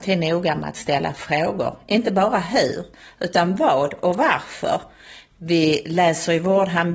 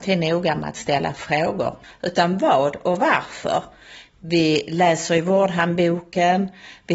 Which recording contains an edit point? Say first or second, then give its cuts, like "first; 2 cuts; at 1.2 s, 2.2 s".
second; 1 cut; at 1.8 s